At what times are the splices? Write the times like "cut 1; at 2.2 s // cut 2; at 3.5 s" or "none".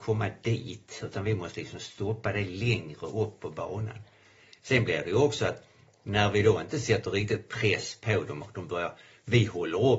none